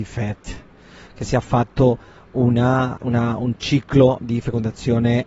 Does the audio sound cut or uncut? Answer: cut